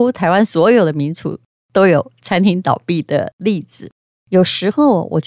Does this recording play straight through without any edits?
no; 1 cut; at 4.2 s

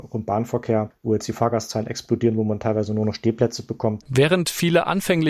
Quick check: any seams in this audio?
yes; 1 cut; at 4.0 s

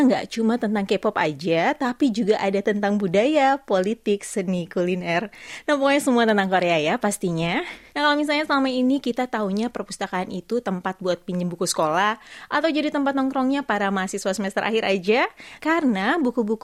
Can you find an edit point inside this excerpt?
yes; 2 cuts; at 7.9 s, 15.6 s

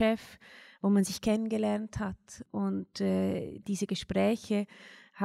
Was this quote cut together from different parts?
yes; 1 cut; at 3.6 s

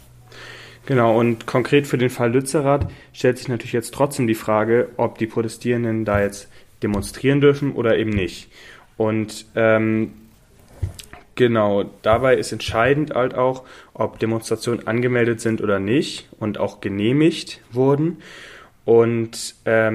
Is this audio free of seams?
yes; 0 cuts

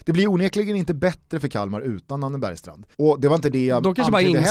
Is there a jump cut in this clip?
yes; 1 cut; at 2.9 s

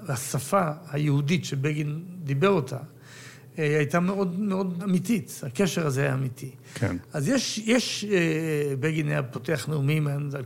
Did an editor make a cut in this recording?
yes; 1 cut; at 4.8 s

